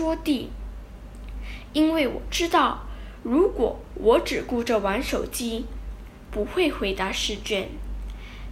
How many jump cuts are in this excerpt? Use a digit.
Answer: 1